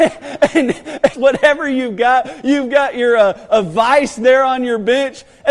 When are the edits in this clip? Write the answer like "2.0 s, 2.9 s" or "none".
1.1 s